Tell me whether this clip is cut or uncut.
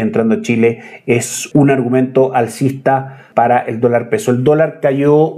uncut